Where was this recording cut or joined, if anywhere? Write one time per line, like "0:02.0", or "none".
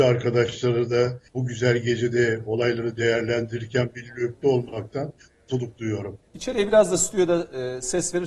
0:01.3
0:06.3